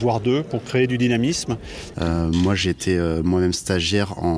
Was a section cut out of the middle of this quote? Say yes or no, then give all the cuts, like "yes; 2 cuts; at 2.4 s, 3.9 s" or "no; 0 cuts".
yes; 1 cut; at 1.9 s